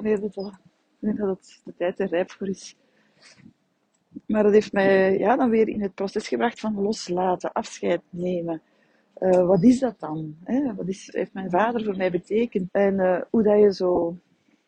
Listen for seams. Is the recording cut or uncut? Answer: cut